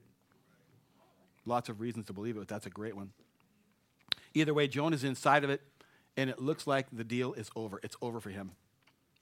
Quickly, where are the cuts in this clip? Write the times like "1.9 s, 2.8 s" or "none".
none

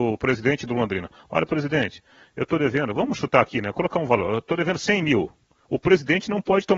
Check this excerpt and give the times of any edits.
5.7 s

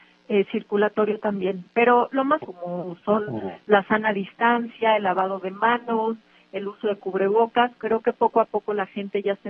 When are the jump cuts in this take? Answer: 2.4 s, 7.8 s

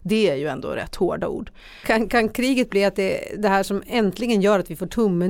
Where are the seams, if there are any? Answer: 1.8 s

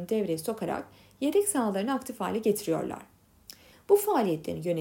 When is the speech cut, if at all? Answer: 3.7 s

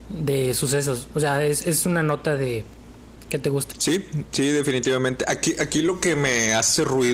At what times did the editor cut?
3.7 s

